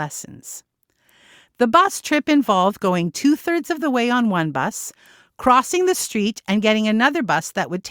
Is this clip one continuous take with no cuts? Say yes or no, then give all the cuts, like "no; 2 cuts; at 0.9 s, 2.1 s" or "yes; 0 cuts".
yes; 0 cuts